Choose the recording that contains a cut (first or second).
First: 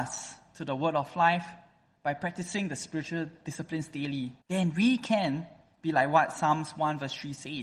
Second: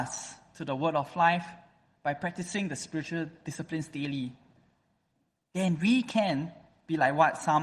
first